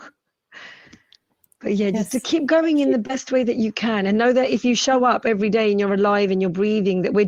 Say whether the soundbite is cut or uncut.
uncut